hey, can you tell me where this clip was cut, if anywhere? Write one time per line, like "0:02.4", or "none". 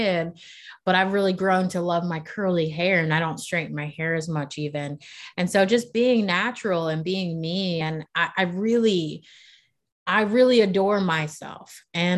none